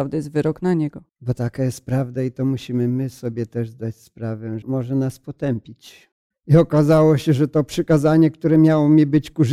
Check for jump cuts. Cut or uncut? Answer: cut